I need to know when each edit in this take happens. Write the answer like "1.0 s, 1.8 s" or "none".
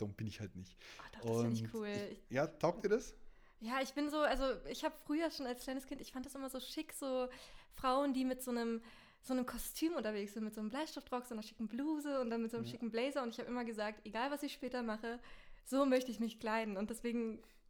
2.2 s